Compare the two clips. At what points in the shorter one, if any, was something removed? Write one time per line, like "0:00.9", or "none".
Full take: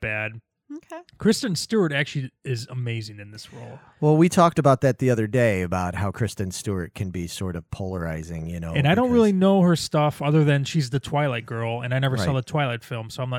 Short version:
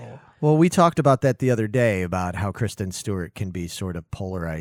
none